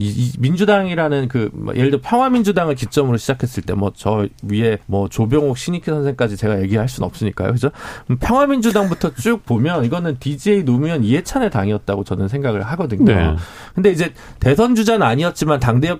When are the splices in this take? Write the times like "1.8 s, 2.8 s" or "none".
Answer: 4.8 s